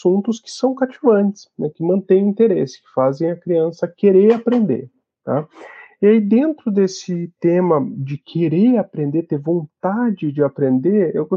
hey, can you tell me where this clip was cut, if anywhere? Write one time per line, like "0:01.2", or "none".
none